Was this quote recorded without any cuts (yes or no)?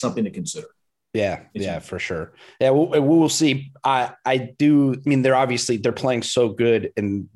yes